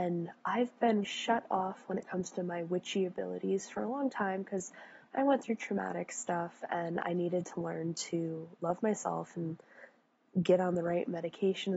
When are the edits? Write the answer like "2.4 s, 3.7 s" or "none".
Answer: 1.0 s